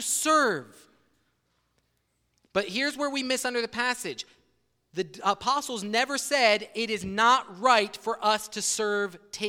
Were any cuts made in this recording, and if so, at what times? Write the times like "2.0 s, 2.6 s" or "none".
none

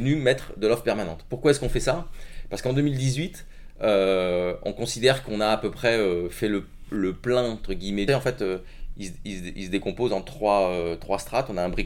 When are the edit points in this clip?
8.1 s

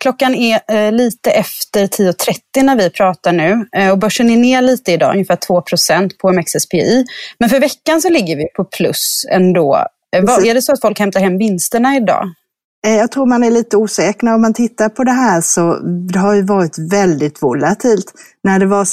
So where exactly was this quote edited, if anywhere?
10.4 s

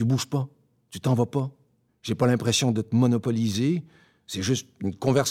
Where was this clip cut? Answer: 1.9 s

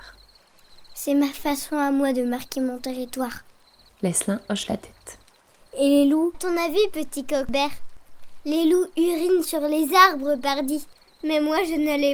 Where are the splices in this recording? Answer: 6.3 s

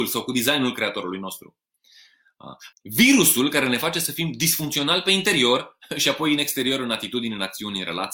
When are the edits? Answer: 2.7 s

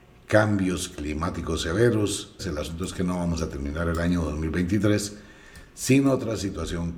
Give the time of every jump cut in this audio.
2.4 s

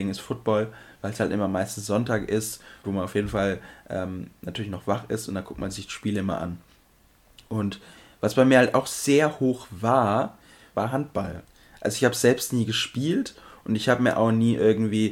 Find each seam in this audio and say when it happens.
2.8 s, 10.7 s

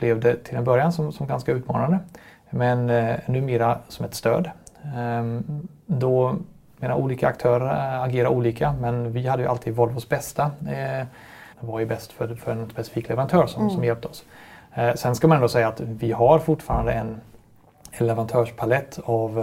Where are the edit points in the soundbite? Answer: 11.5 s

